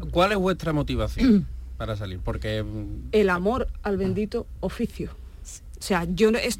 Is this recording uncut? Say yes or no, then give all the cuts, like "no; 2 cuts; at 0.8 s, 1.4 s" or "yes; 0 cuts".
yes; 0 cuts